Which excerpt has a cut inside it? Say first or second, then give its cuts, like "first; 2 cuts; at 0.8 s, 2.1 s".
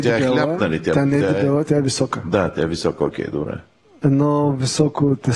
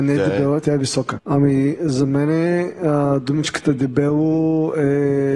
second; 1 cut; at 1.2 s